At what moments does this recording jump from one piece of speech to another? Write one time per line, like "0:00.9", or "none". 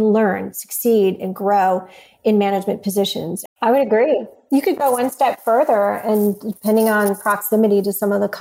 0:03.5